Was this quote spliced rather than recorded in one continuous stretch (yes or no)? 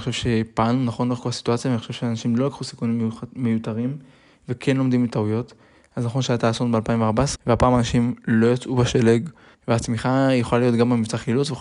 yes